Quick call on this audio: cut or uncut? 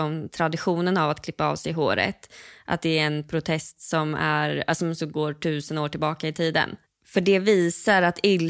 uncut